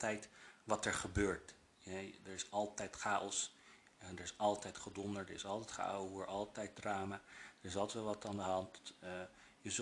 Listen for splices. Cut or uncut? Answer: uncut